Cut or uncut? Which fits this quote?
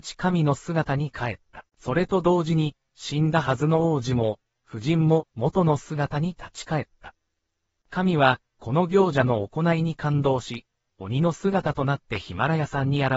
cut